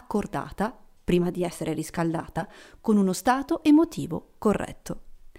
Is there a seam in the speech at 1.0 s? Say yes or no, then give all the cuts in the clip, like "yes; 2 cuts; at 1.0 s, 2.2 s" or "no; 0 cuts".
no; 0 cuts